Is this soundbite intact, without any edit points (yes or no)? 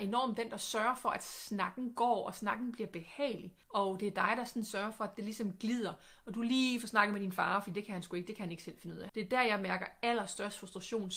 no